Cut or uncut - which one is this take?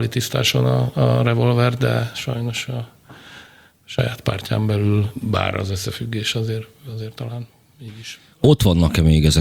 uncut